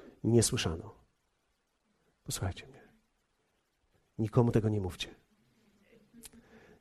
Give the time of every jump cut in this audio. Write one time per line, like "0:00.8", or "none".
none